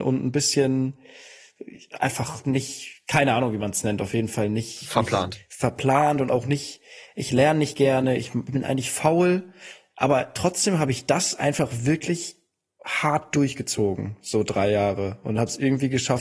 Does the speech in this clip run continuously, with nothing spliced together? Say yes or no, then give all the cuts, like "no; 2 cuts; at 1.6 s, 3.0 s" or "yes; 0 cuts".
yes; 0 cuts